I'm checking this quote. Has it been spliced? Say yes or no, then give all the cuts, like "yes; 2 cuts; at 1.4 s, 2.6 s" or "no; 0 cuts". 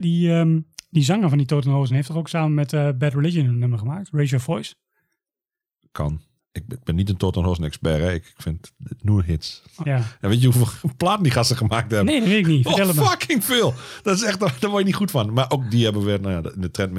yes; 2 cuts; at 6.4 s, 9.8 s